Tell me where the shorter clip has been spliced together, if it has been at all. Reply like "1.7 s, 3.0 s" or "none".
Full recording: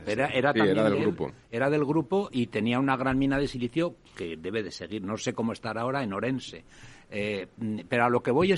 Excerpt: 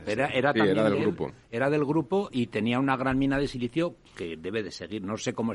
none